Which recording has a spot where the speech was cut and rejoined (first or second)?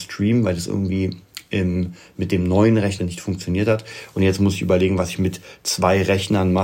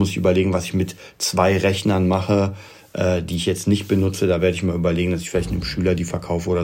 first